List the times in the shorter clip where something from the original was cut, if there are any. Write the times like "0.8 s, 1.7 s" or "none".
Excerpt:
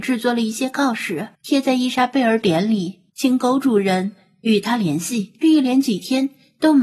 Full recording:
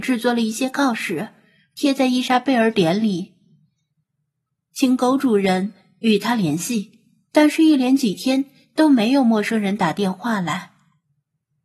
1.3 s, 3.1 s, 5.4 s